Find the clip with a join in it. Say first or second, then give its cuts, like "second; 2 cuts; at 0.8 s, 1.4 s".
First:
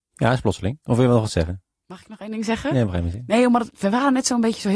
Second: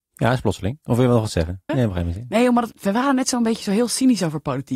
second; 1 cut; at 1.7 s